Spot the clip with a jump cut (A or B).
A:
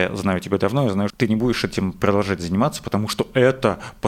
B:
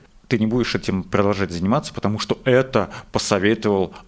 A